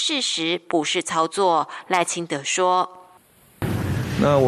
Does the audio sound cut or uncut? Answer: uncut